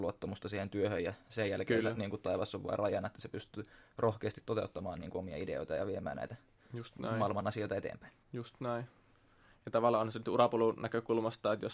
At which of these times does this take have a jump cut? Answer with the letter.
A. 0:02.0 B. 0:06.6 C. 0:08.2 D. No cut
C